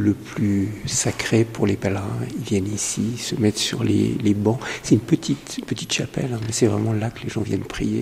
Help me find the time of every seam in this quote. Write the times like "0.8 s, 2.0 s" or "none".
none